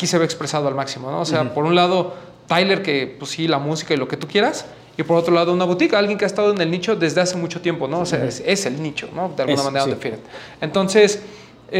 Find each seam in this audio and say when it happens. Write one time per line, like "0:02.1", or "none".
none